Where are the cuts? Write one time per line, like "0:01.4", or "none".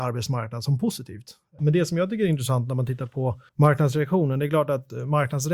0:01.6
0:03.5